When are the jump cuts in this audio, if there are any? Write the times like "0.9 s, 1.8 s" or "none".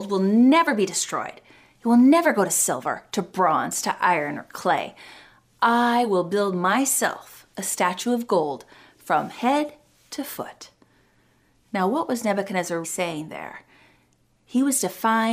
12.8 s